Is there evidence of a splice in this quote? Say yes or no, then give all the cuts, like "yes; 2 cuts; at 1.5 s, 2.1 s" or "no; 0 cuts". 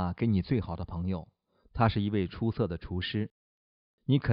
no; 0 cuts